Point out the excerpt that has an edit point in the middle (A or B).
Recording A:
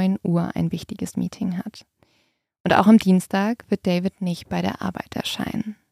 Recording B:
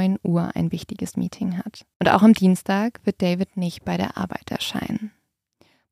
B